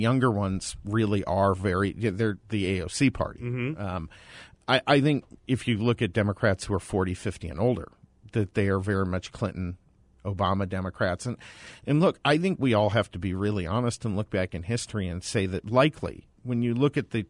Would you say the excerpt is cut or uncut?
uncut